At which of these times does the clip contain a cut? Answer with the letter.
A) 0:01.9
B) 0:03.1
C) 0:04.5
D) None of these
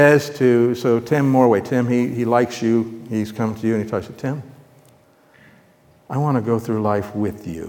D